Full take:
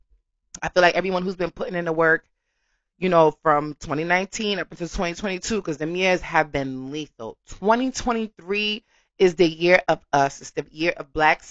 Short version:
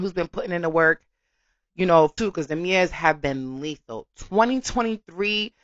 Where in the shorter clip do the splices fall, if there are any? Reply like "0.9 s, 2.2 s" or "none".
2.2 s